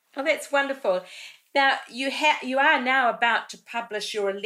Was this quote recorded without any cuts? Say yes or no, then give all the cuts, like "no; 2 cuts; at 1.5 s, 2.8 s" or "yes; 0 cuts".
yes; 0 cuts